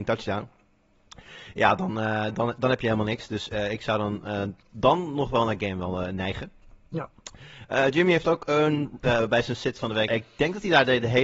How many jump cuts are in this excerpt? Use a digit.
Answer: 2